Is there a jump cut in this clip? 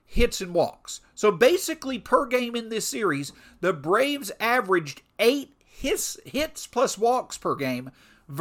no; 0 cuts

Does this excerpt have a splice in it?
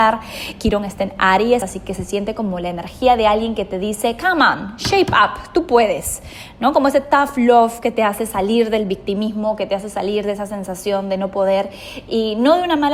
no; 0 cuts

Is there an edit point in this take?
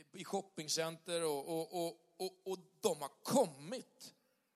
no; 0 cuts

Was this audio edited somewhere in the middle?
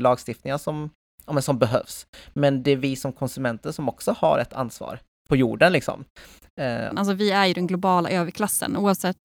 yes; 2 cuts; at 5.3 s, 6.9 s

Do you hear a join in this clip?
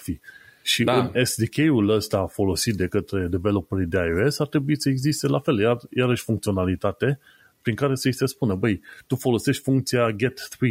no; 0 cuts

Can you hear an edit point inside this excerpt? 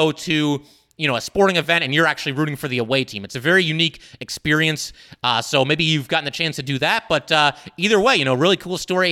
no; 0 cuts

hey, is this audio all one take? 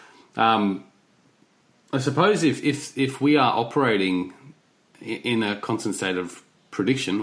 yes; 0 cuts

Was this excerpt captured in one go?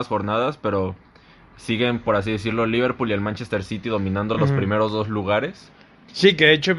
yes; 0 cuts

